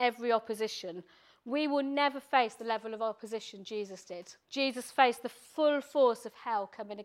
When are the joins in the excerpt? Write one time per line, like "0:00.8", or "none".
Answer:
0:04.4

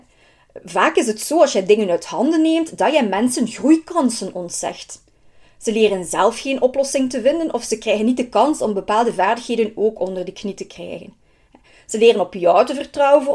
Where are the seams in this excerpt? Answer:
none

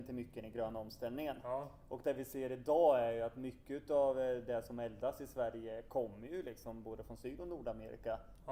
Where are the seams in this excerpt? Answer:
none

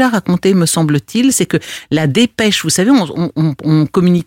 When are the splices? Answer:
none

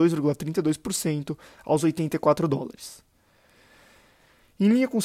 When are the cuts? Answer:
none

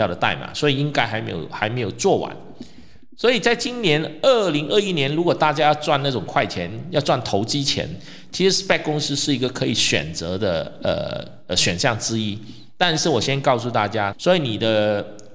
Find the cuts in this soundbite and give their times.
0:14.1

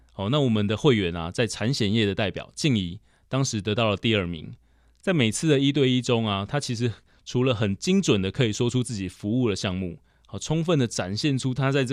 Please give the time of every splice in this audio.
none

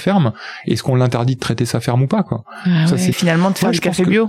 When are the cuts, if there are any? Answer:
0:03.1

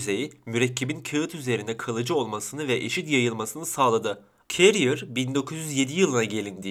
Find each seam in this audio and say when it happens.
0:04.5

